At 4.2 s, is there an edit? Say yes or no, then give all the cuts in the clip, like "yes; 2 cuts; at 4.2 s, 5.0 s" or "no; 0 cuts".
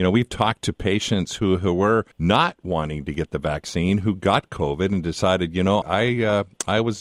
no; 2 cuts; at 2.1 s, 5.8 s